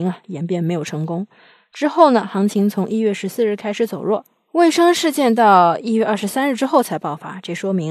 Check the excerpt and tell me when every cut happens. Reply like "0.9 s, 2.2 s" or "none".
none